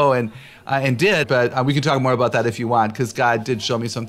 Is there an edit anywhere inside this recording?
yes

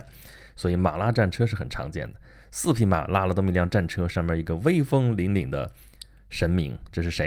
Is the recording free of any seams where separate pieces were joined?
yes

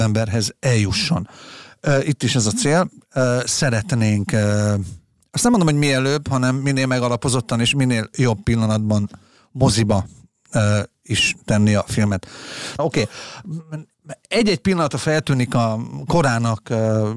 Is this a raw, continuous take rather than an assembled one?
no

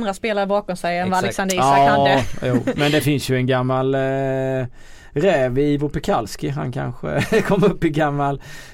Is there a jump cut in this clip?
no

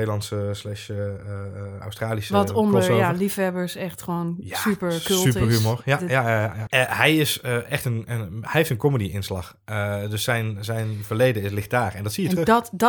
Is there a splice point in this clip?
yes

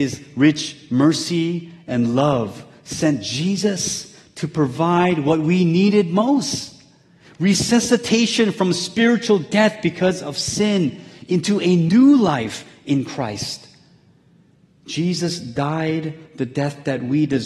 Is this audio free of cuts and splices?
yes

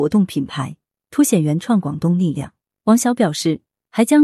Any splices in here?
no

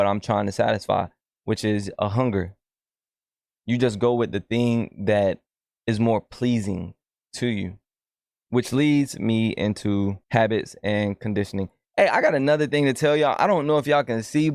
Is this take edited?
yes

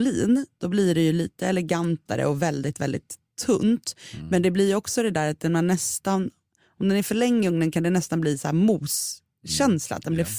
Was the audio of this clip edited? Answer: no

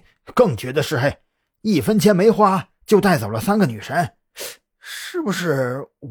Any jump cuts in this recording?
no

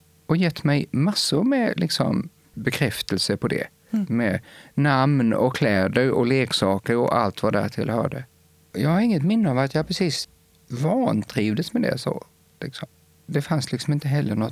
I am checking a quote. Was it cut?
no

